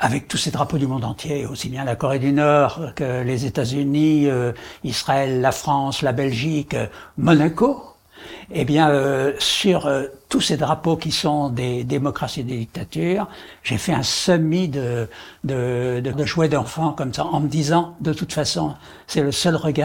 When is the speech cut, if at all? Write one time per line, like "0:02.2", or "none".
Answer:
0:16.1